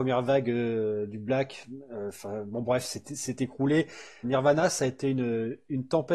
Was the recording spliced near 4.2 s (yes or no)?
yes